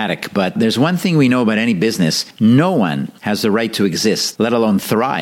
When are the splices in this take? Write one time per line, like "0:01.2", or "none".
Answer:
none

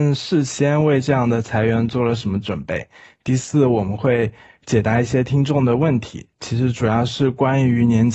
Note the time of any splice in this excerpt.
none

